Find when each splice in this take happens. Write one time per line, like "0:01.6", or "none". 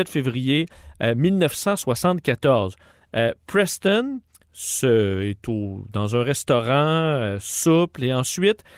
none